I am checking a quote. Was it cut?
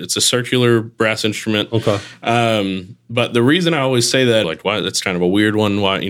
yes; 1 cut; at 4.4 s

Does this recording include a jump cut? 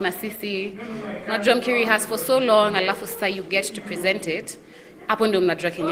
no; 0 cuts

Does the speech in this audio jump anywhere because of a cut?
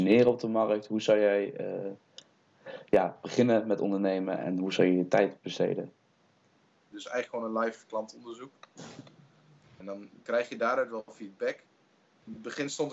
yes; 2 cuts; at 6.9 s, 9.8 s

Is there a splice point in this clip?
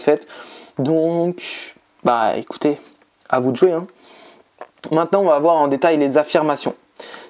no; 0 cuts

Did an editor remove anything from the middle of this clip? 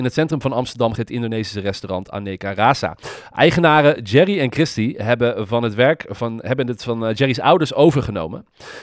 yes; 1 cut; at 0.9 s

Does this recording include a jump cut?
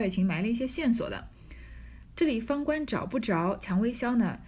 no; 0 cuts

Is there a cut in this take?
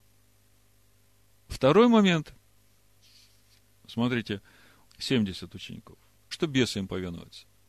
yes; 2 cuts; at 4.8 s, 6.3 s

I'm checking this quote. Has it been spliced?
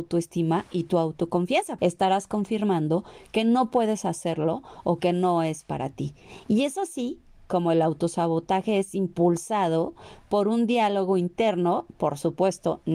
yes; 1 cut; at 1.8 s

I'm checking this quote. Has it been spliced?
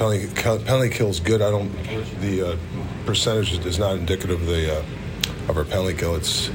yes; 1 cut; at 2.2 s

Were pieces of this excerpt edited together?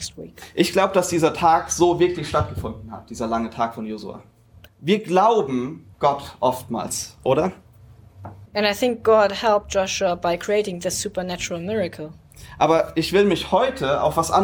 yes; 3 cuts; at 4.7 s, 5.9 s, 8.5 s

